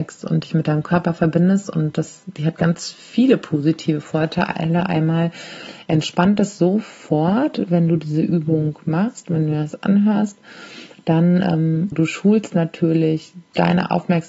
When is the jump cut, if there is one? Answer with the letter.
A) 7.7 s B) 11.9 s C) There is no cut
B